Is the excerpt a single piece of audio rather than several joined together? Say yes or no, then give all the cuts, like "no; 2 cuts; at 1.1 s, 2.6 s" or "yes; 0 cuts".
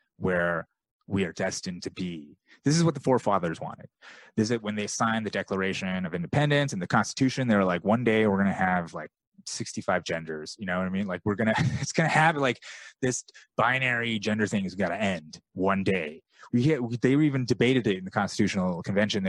yes; 0 cuts